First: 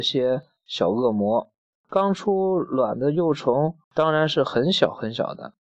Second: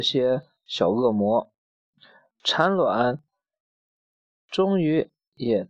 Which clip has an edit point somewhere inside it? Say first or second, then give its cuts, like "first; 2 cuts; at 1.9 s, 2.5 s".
first; 2 cuts; at 1.7 s, 3.8 s